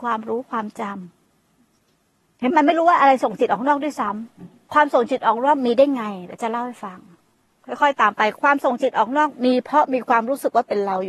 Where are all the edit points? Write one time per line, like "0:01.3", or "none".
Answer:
0:02.5
0:04.7